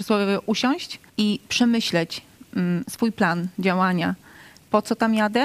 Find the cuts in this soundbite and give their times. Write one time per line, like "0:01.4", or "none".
0:01.1